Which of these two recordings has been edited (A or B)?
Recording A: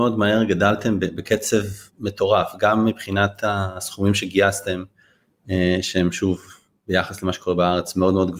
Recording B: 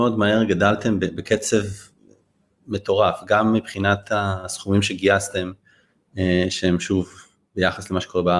A